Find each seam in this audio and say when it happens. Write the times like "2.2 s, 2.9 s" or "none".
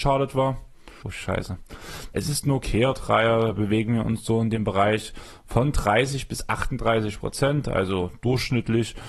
1.0 s, 2.1 s